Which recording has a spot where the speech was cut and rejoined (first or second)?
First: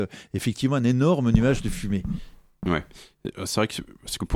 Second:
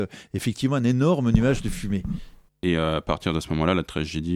second